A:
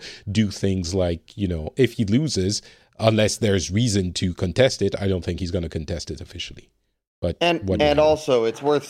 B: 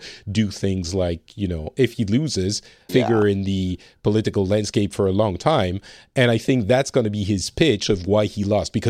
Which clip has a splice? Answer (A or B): B